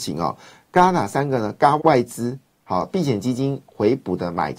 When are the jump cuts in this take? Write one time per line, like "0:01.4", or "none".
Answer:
0:01.8